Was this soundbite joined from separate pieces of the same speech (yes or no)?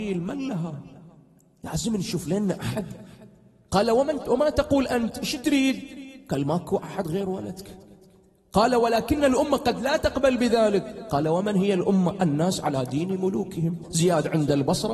yes